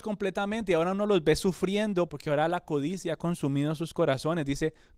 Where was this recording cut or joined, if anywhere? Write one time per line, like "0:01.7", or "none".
0:02.1

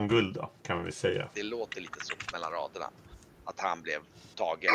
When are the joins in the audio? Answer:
0:01.3

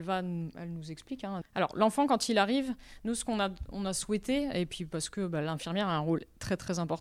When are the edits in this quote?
0:01.4

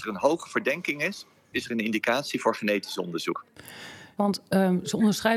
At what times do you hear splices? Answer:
0:01.5
0:04.2

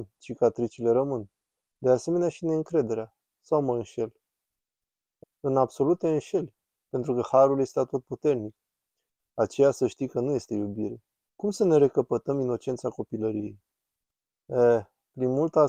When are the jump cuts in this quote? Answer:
0:05.2
0:09.2
0:11.3

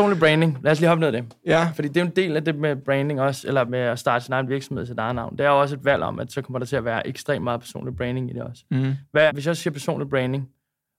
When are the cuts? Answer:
0:03.7
0:09.3

